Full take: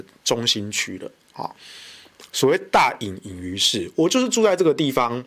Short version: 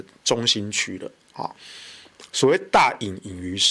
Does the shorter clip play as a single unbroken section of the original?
yes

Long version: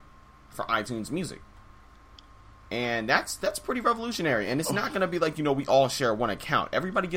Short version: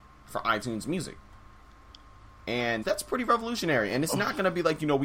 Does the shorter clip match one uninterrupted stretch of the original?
no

